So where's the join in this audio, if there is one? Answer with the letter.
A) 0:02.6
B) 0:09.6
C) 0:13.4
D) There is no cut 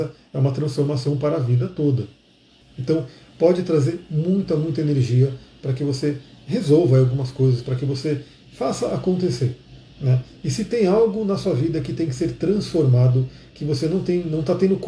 A